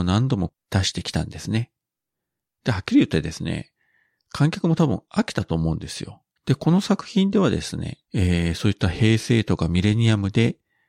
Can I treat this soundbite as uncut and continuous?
no; 2 cuts; at 6.4 s, 8.0 s

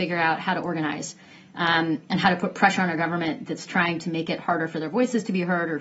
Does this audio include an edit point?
no; 0 cuts

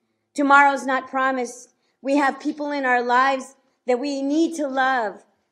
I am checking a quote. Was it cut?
no; 0 cuts

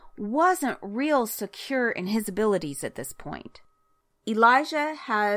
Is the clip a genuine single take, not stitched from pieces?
yes; 0 cuts

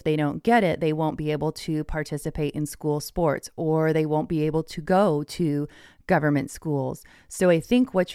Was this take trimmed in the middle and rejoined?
no; 0 cuts

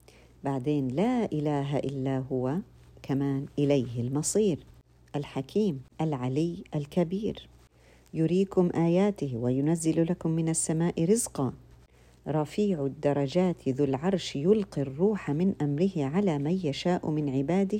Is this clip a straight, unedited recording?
no; 1 cut; at 5.9 s

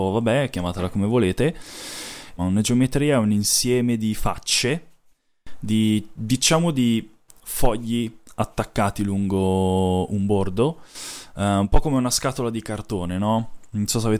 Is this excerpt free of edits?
no; 1 cut; at 2.4 s

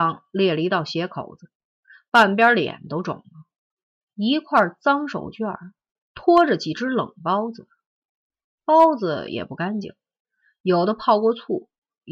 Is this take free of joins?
no; 1 cut; at 3.9 s

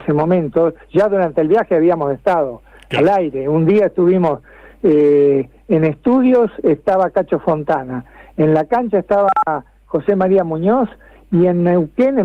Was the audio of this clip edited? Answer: no; 0 cuts

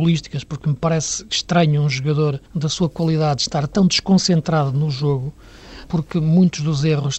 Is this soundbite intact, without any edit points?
no; 2 cuts; at 2.5 s, 5.9 s

